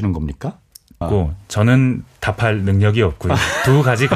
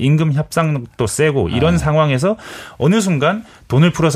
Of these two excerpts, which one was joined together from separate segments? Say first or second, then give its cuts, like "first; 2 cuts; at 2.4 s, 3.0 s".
first; 1 cut; at 1.0 s